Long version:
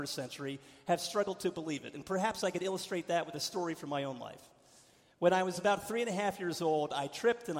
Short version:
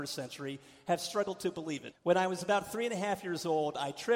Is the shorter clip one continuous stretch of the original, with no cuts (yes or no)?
no